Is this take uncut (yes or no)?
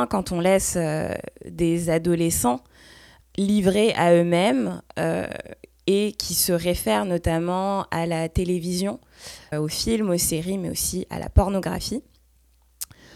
no